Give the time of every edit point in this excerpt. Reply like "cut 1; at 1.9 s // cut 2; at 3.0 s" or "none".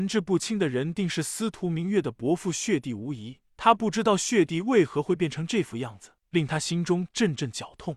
cut 1; at 6.2 s